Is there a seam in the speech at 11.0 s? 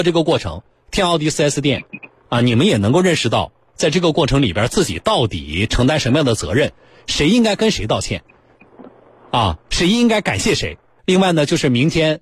yes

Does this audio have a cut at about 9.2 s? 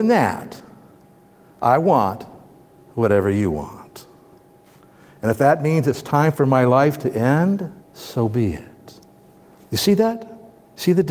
no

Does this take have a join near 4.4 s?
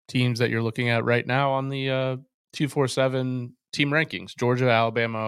no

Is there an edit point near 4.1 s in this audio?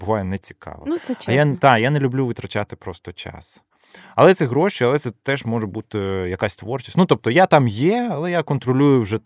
no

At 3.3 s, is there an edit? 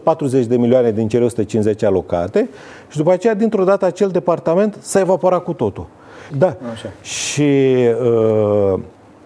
no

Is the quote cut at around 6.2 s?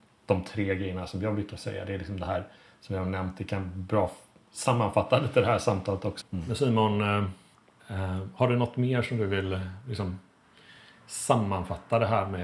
yes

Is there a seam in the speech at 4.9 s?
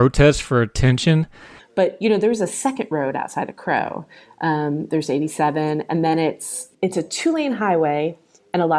no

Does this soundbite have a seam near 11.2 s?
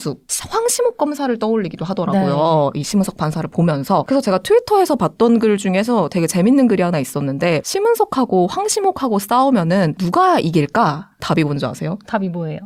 no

